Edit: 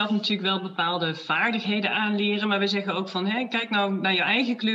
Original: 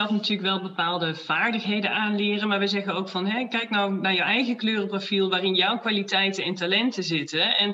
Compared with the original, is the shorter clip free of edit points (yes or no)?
yes